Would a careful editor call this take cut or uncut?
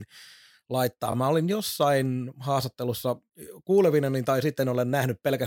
uncut